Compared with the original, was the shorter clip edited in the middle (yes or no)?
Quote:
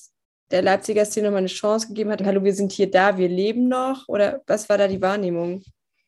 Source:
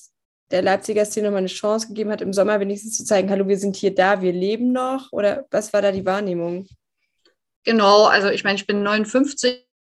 yes